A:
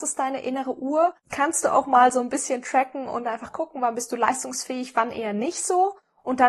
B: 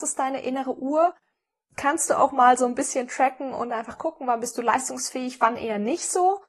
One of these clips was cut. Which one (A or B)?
A